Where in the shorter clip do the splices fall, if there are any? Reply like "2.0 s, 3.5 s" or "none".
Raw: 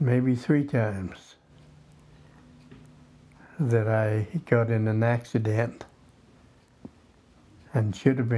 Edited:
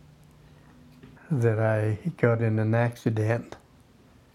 1.2 s